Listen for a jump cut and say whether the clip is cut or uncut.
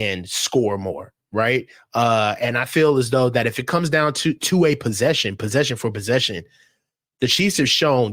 uncut